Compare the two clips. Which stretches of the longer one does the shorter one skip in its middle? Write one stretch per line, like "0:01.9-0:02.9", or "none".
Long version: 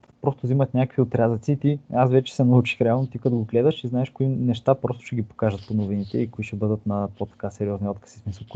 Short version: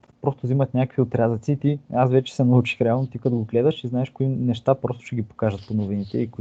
none